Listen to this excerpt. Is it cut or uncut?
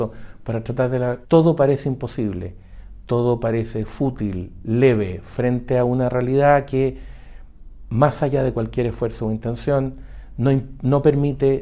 cut